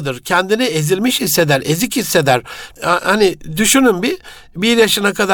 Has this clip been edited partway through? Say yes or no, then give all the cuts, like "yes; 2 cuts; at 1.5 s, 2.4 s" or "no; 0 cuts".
yes; 1 cut; at 2.8 s